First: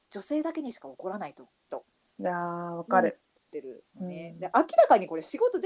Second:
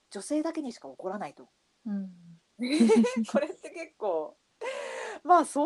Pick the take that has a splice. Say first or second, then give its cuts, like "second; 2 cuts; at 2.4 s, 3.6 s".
first; 1 cut; at 1.7 s